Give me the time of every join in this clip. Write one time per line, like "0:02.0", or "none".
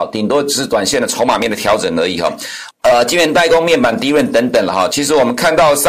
0:02.7
0:04.9